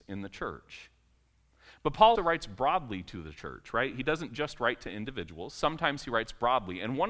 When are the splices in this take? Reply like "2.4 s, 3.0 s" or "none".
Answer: 2.1 s